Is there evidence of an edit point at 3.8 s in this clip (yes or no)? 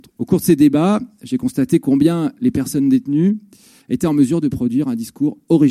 yes